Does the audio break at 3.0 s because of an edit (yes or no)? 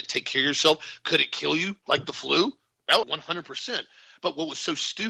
yes